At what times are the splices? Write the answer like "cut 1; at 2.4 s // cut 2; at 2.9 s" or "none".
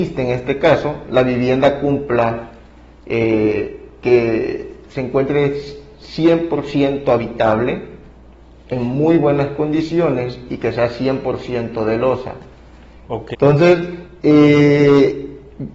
cut 1; at 13.3 s